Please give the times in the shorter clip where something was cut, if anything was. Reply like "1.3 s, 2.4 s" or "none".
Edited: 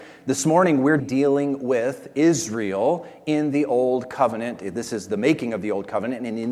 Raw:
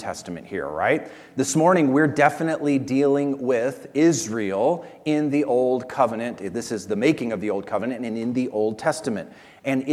1.0 s

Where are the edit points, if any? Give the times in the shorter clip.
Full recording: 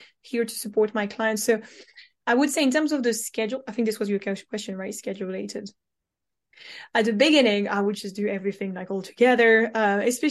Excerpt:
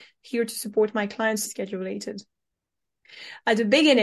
1.4 s

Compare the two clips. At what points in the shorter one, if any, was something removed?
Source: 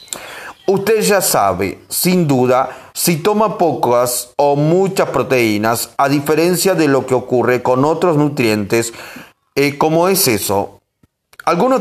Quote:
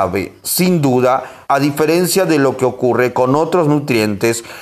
1.5 s

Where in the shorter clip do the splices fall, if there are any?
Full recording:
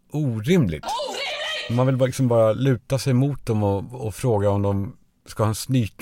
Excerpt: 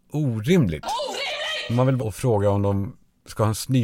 2.0 s

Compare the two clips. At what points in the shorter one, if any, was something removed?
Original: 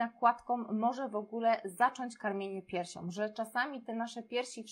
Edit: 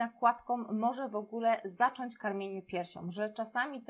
none

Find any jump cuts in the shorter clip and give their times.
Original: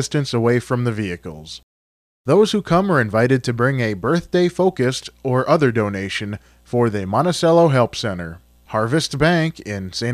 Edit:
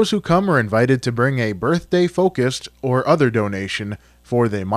none

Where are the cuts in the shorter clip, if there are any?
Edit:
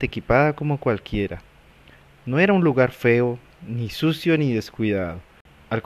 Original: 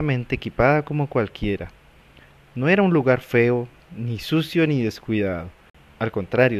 none

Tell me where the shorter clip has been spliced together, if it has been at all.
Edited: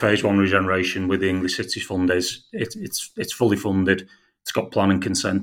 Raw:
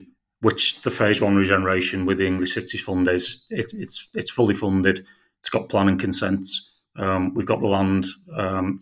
none

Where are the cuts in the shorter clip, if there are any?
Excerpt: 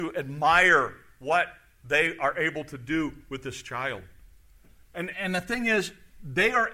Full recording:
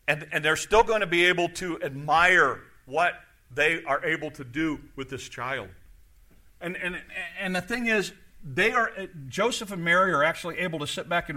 5.1 s

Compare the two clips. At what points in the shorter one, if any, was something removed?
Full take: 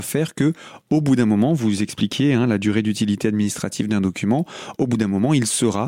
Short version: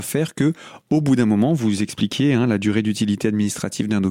none

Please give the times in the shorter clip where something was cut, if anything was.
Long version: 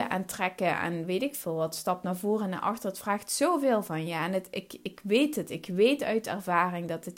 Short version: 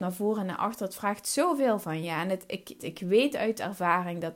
2.8 s

